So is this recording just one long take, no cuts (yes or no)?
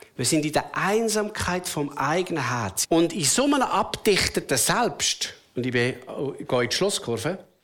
no